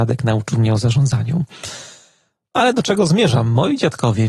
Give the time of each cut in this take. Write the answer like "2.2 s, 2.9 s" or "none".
none